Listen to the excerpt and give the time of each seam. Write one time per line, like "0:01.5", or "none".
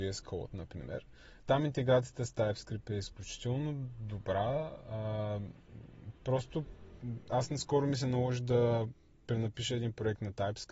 none